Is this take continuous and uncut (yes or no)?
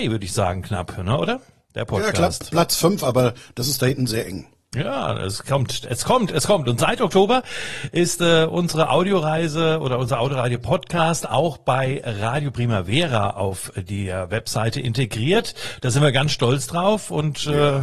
yes